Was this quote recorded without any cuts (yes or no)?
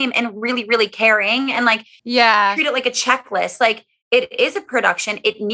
yes